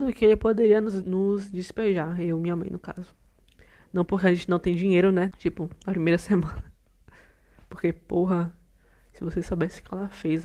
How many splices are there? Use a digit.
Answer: 2